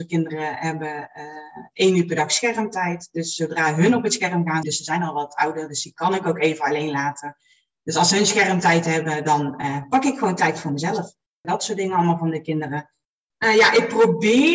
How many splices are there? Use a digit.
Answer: 3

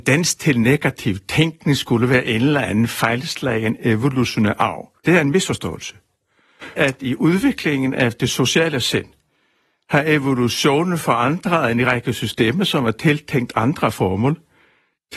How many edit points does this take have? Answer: 2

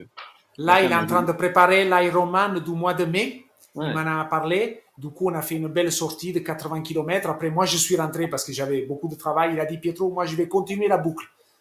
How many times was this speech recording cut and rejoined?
0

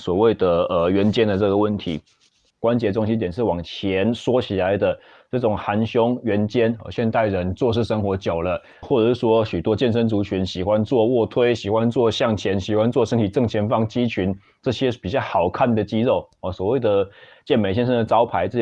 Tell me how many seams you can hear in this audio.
2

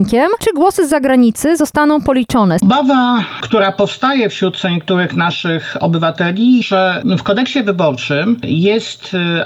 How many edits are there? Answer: 2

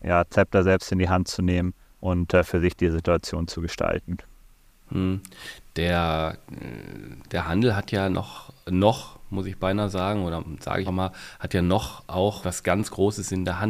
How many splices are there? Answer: 2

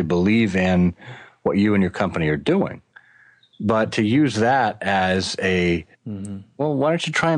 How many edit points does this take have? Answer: 1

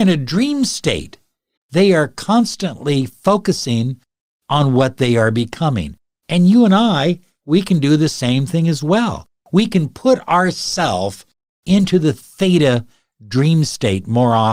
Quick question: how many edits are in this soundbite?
1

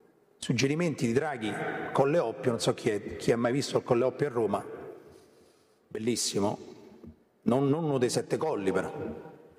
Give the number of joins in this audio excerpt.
0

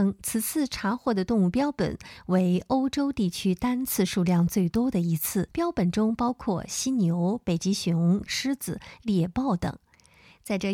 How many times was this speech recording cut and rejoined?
2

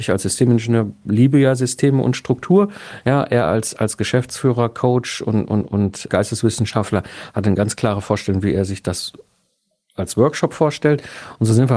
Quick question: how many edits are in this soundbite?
0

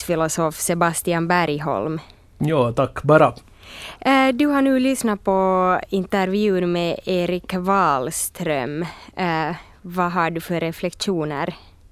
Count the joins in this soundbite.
0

